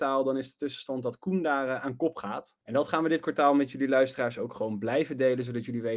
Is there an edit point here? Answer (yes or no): no